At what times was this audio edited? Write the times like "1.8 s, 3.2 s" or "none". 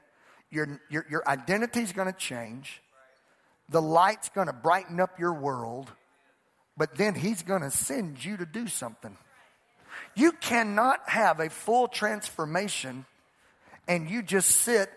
none